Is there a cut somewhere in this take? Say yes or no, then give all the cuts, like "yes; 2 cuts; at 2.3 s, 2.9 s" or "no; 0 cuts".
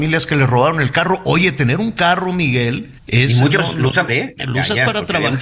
yes; 2 cuts; at 3.0 s, 4.1 s